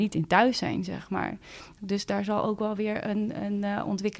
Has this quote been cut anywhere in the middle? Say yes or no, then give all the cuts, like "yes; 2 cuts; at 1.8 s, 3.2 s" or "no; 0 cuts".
yes; 1 cut; at 1.8 s